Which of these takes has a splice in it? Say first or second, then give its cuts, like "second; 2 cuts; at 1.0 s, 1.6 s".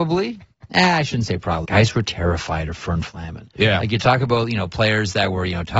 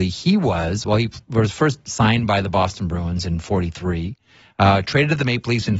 first; 1 cut; at 1.6 s